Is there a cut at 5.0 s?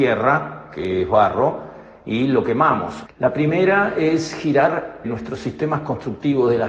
yes; 2 cuts; at 3.1 s, 5.0 s

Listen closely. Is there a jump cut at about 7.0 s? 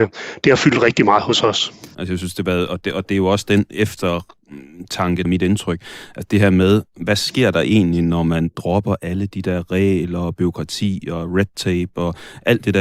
no; 2 cuts; at 1.9 s, 5.2 s

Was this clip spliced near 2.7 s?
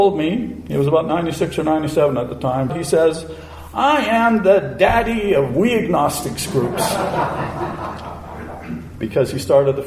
yes; 1 cut; at 2.7 s

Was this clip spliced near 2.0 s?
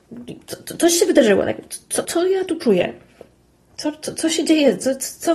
yes; 1 cut; at 2.0 s

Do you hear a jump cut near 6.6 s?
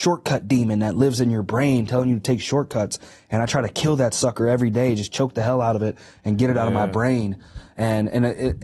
no; 0 cuts

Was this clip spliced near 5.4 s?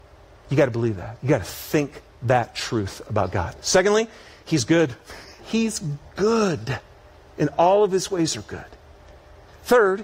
yes; 1 cut; at 5.4 s

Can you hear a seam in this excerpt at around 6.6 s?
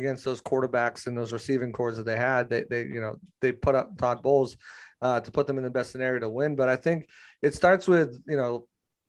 no; 1 cut; at 4.0 s

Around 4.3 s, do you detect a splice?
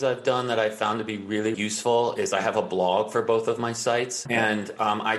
yes; 2 cuts; at 1.5 s, 4.3 s

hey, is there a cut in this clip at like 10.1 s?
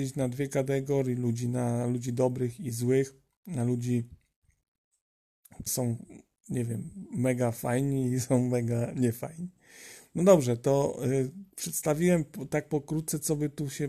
no; 1 cut; at 5.7 s

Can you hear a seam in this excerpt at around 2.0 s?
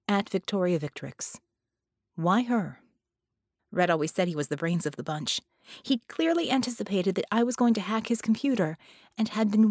no; 1 cut; at 3.6 s

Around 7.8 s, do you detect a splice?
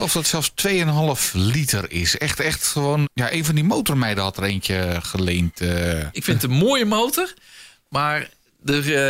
no; 2 cuts; at 3.0 s, 6.1 s

